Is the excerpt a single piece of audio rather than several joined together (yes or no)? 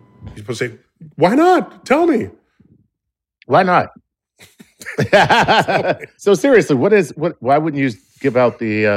no